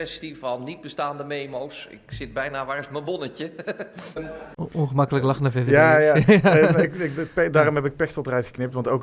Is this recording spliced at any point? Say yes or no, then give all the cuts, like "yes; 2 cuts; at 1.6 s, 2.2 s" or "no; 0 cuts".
yes; 1 cut; at 4.2 s